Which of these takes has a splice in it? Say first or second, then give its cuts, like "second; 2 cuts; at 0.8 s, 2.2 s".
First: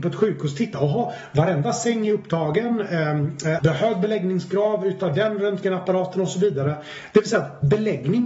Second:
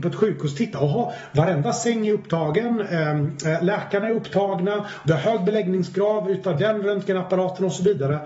first; 1 cut; at 3.6 s